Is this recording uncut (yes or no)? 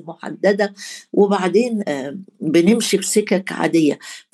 no